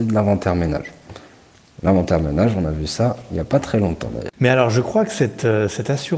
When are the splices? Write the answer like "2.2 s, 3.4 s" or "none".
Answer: 4.3 s